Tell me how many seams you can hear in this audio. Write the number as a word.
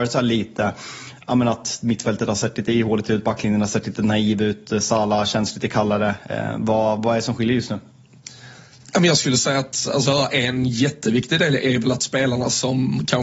zero